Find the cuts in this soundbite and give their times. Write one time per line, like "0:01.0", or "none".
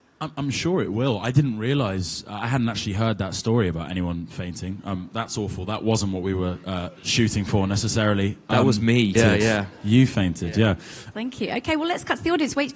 0:09.2
0:11.1